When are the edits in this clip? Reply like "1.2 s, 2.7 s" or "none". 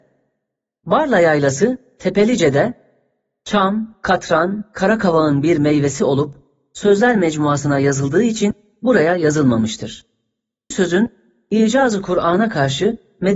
10.7 s